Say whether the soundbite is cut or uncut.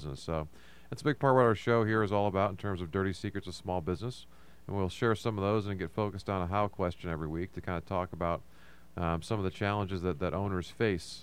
uncut